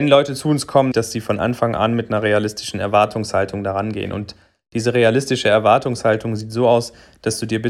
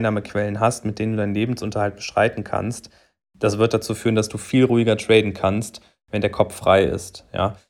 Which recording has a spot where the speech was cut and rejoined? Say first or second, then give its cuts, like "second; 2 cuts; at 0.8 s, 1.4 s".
first; 1 cut; at 0.9 s